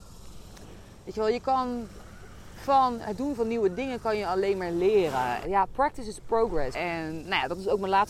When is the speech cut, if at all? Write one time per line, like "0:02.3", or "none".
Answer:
0:05.4
0:06.7